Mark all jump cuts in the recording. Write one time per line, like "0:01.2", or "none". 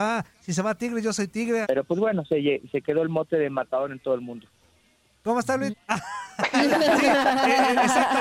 0:01.6
0:05.7